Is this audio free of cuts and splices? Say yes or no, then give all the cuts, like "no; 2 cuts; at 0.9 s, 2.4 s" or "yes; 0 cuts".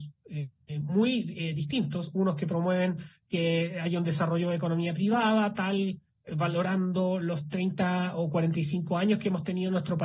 yes; 0 cuts